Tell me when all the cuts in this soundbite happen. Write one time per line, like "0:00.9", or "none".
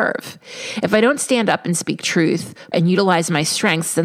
0:02.7